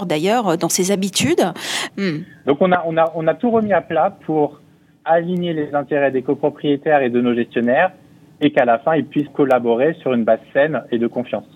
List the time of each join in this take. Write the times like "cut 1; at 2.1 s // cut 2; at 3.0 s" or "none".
cut 1; at 1.9 s // cut 2; at 9.3 s